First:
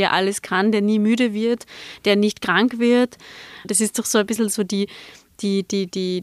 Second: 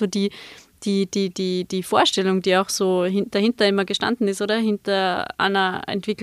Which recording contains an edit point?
first; 1 cut; at 3.6 s

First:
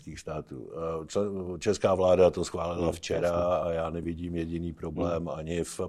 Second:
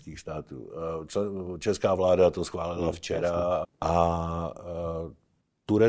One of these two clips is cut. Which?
second; 1 cut; at 3.6 s

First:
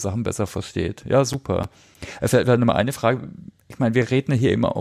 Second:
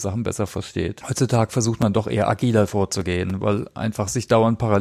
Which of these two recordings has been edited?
second; 1 cut; at 1.0 s

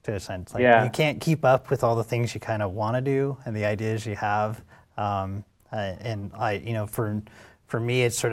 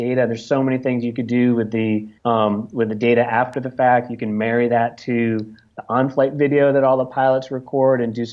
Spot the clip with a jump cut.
second; 1 cut; at 2.2 s

